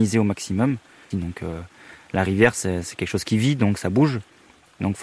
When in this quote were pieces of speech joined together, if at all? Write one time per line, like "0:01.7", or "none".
0:01.1